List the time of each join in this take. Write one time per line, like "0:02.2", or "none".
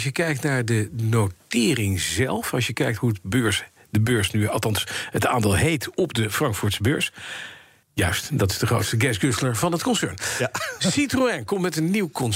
0:07.8